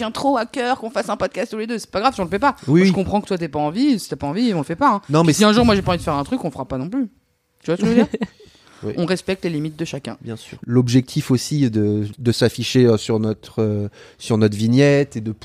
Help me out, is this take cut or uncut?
uncut